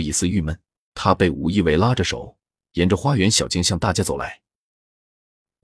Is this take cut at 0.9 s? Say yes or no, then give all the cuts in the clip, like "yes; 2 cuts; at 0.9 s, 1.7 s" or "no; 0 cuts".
yes; 1 cut; at 0.9 s